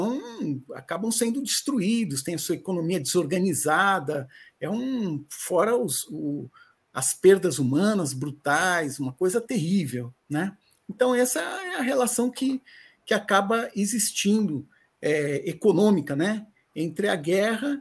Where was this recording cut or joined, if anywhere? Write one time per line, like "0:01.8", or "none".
none